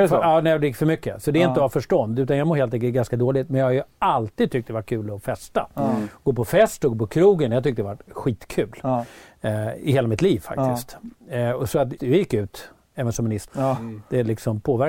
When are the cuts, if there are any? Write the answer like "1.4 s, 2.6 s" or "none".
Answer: 12.0 s, 13.5 s